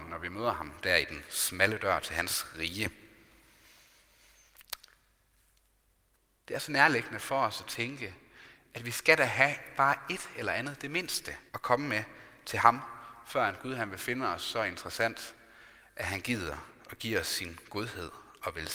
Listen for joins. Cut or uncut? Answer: cut